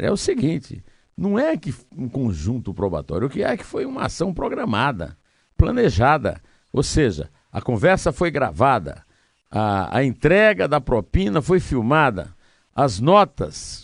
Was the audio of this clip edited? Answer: no; 0 cuts

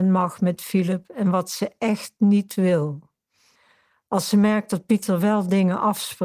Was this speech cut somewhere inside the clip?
no; 0 cuts

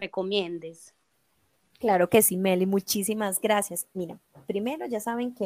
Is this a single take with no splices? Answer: yes; 0 cuts

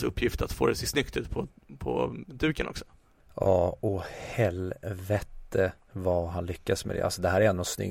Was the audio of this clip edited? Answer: no; 0 cuts

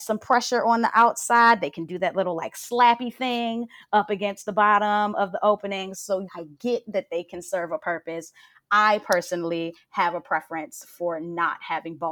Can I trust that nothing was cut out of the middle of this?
no; 1 cut; at 6.3 s

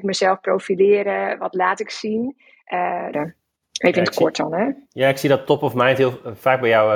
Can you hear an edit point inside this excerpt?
yes; 1 cut; at 3.1 s

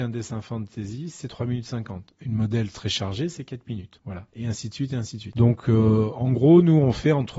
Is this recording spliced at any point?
no; 0 cuts

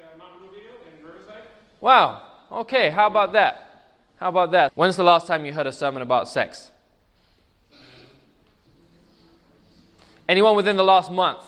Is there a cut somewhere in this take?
yes; 1 cut; at 4.7 s

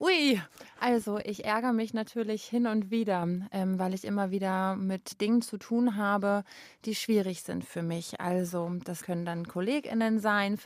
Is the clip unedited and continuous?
yes; 0 cuts

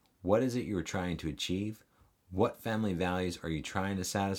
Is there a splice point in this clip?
no; 0 cuts

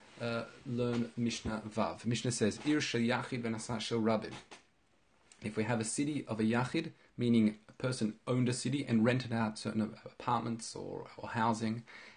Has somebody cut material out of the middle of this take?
no; 0 cuts

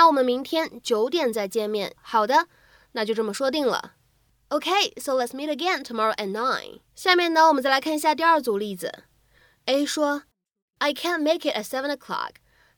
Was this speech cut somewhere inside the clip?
yes; 2 cuts; at 1.9 s, 6.9 s

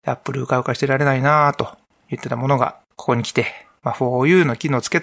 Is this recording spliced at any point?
no; 0 cuts

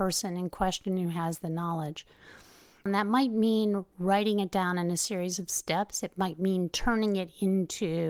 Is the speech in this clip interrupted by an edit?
yes; 1 cut; at 2.9 s

